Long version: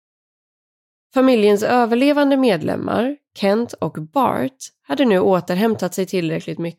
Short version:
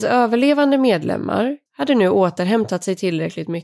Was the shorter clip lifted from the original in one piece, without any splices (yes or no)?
no